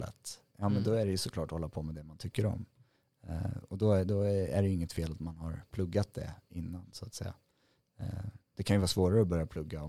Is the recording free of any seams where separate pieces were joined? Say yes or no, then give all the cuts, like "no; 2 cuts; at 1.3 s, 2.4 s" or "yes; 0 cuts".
yes; 0 cuts